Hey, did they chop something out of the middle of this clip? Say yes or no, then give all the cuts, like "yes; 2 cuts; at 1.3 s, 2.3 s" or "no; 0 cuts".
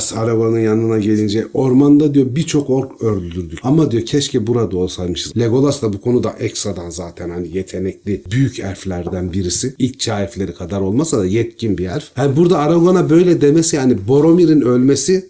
yes; 1 cut; at 5.3 s